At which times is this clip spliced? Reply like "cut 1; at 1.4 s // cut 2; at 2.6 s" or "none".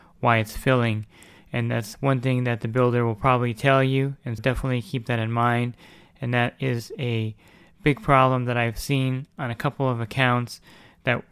cut 1; at 4.4 s